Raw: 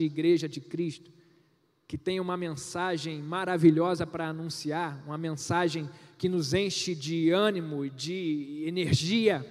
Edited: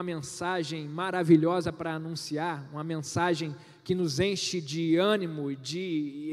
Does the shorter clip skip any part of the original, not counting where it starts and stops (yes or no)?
no